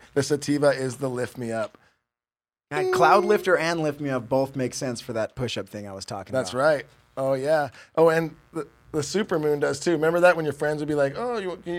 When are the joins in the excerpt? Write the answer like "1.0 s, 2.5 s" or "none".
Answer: none

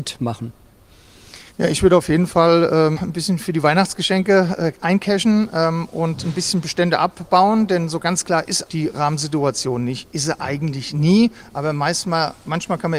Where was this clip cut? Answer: 1.5 s, 3.0 s, 8.6 s

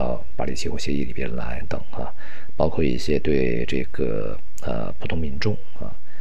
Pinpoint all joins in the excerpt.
1.6 s

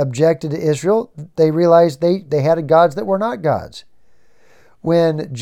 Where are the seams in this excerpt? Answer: none

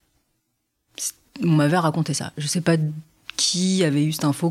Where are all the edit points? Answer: none

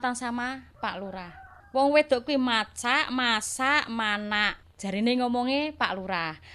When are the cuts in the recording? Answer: none

